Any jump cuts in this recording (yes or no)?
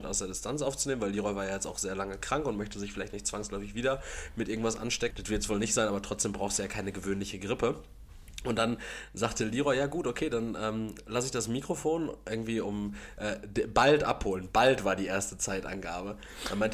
yes